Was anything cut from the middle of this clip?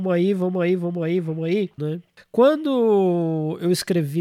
yes; 1 cut; at 1.8 s

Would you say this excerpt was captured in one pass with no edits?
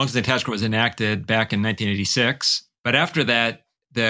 no; 1 cut; at 2.8 s

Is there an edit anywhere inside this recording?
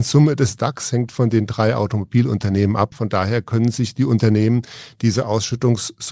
yes; 1 cut; at 2.9 s

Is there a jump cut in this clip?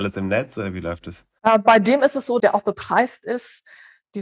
yes; 1 cut; at 2.4 s

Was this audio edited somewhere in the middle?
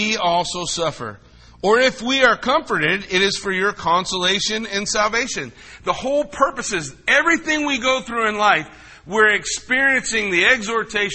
no; 0 cuts

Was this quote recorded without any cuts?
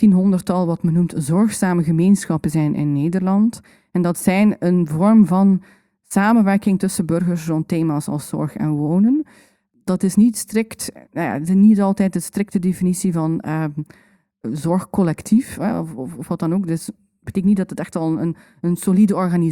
yes; 0 cuts

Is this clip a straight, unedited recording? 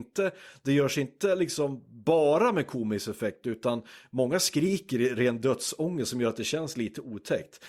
yes; 0 cuts

